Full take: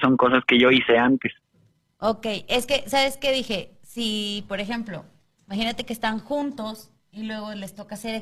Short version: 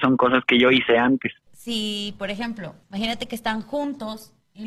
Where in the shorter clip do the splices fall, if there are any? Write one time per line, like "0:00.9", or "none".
0:01.5
0:02.8